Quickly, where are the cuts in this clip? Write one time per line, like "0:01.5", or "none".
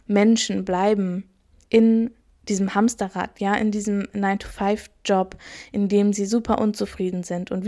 none